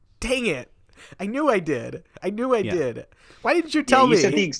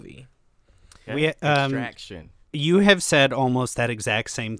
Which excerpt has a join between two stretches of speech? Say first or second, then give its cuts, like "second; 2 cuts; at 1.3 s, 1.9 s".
second; 2 cuts; at 1.1 s, 2.5 s